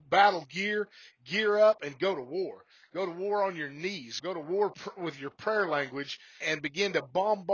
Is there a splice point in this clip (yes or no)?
yes